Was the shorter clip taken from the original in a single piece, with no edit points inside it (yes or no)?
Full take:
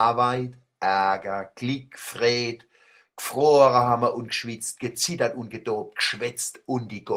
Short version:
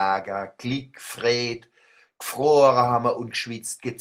yes